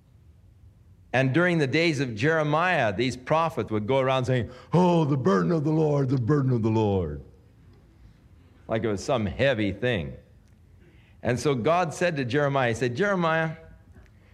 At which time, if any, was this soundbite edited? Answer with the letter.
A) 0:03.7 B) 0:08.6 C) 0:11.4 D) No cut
A